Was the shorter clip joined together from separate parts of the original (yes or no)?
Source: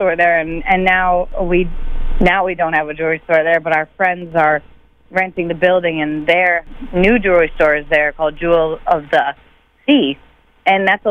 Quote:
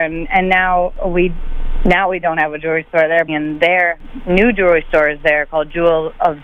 yes